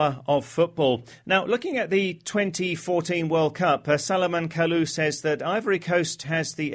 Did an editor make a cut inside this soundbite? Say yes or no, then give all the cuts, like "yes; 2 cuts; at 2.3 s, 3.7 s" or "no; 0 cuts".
no; 0 cuts